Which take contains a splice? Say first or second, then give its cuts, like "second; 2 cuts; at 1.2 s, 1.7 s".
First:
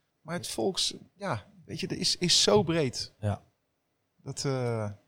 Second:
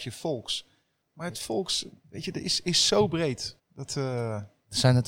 second; 2 cuts; at 2.0 s, 3.6 s